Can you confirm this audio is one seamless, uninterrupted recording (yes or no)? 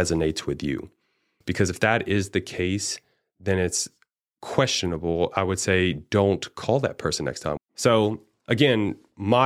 no